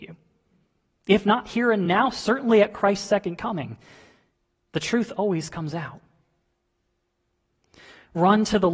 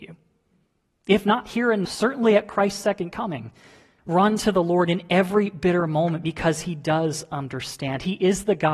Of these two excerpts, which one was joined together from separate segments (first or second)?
second